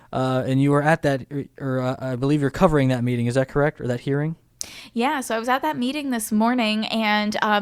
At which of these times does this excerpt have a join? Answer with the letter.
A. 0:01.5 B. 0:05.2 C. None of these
C